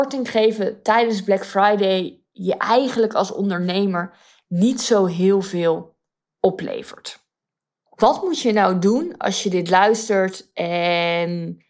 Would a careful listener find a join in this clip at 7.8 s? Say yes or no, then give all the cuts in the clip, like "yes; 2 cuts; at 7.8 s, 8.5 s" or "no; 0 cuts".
no; 0 cuts